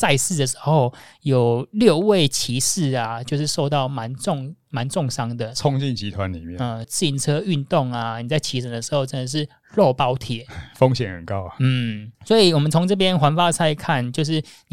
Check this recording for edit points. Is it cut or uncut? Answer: cut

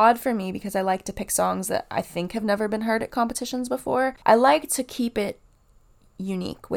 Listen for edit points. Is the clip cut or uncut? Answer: uncut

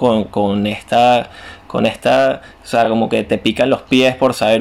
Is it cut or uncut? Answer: uncut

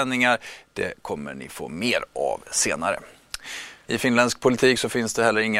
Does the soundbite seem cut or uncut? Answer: cut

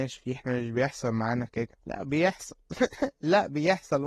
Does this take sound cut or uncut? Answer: cut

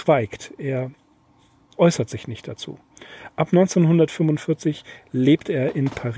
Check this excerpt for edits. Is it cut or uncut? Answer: uncut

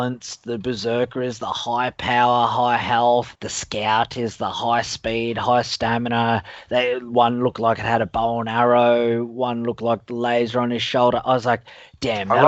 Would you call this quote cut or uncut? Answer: uncut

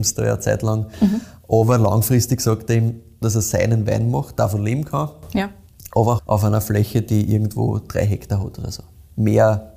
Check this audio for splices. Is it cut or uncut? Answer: cut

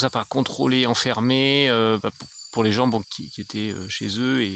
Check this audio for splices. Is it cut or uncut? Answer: cut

